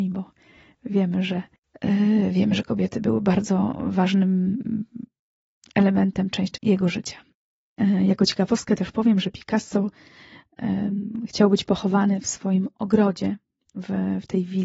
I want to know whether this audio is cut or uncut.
cut